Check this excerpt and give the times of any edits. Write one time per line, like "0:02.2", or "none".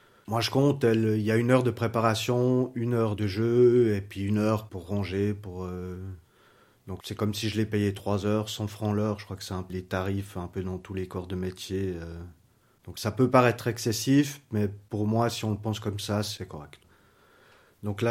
0:09.7